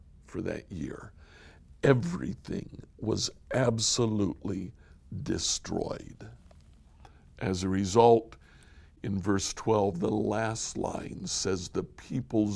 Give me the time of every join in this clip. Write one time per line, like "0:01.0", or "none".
none